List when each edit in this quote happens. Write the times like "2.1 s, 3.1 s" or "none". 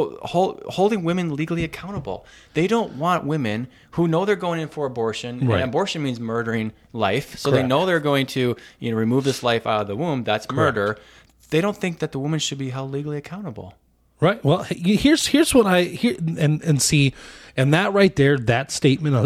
none